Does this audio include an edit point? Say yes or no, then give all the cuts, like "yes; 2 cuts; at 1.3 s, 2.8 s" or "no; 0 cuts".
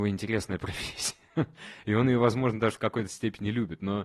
no; 0 cuts